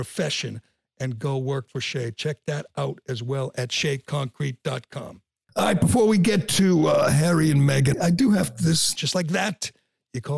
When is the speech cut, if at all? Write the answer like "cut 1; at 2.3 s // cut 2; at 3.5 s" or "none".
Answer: cut 1; at 7.9 s // cut 2; at 9.0 s

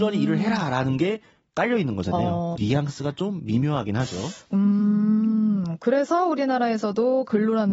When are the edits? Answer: cut 1; at 2.5 s

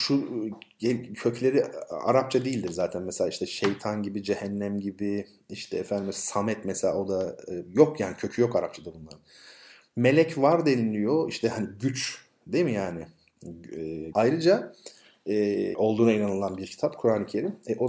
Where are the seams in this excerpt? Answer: cut 1; at 14.1 s // cut 2; at 15.7 s

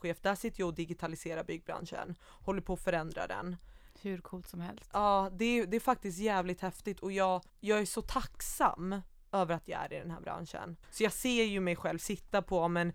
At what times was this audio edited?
cut 1; at 7.5 s // cut 2; at 10.8 s

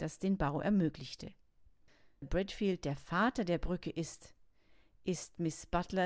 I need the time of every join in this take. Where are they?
cut 1; at 2.2 s

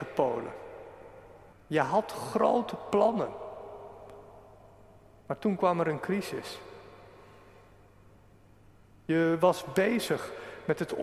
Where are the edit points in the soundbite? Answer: cut 1; at 1.5 s

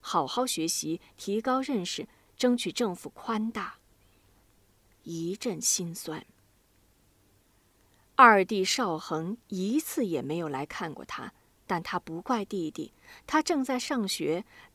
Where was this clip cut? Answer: cut 1; at 5.0 s

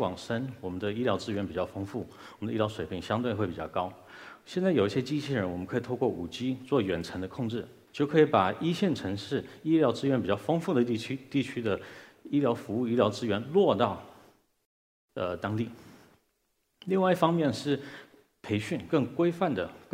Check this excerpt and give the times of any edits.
cut 1; at 7.9 s

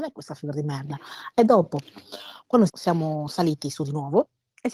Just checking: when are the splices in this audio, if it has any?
cut 1; at 2.7 s

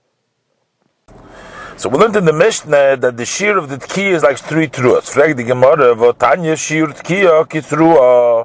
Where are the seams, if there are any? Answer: none

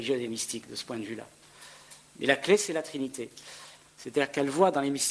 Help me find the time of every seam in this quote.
cut 1; at 3.8 s

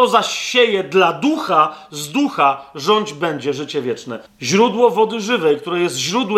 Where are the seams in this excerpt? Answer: cut 1; at 4.3 s

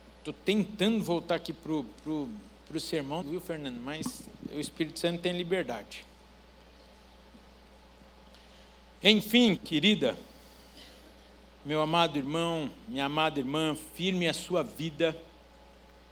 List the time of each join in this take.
cut 1; at 3.2 s // cut 2; at 9.6 s

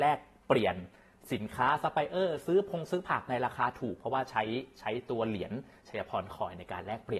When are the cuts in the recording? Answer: none

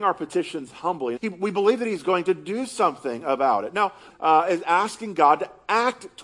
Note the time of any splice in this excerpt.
cut 1; at 1.2 s // cut 2; at 4.1 s

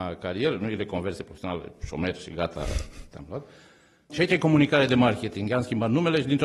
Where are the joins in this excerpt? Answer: cut 1; at 4.1 s

